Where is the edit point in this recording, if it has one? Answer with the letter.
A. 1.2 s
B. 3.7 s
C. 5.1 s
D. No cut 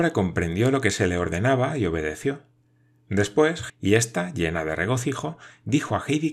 B